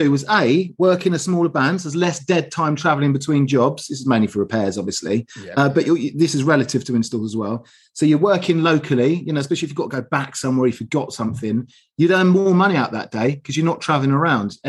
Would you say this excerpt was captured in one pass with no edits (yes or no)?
yes